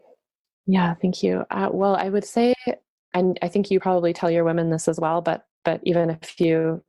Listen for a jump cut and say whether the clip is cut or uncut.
uncut